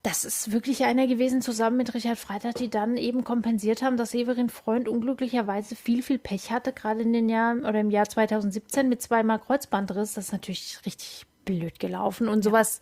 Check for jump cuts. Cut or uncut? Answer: uncut